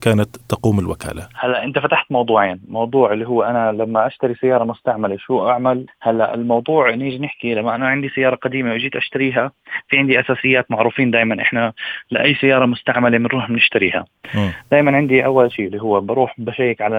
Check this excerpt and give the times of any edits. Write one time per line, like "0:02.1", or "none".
0:05.9